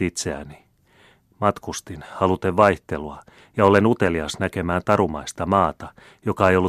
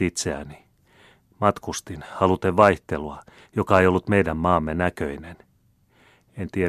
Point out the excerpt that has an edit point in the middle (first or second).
second